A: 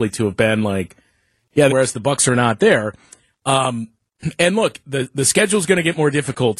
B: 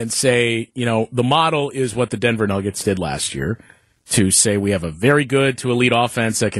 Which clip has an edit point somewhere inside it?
A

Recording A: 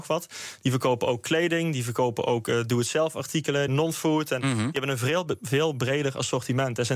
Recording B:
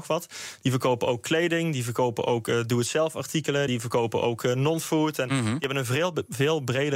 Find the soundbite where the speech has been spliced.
A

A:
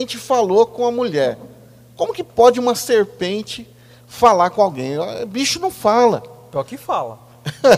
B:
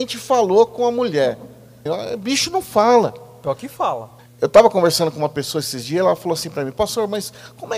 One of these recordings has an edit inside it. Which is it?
B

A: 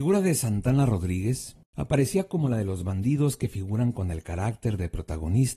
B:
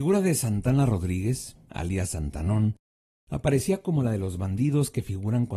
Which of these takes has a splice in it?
A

